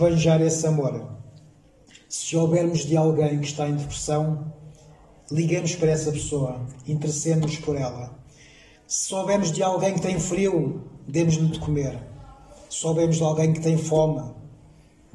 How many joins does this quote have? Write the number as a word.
zero